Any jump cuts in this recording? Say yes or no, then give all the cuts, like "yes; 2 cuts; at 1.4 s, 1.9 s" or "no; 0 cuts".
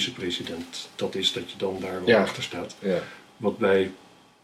no; 0 cuts